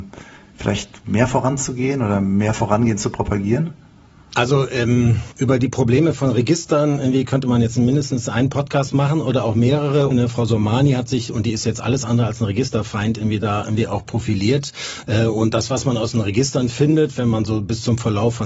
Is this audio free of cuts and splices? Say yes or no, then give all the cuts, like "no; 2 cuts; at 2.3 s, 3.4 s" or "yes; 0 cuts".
no; 1 cut; at 10.1 s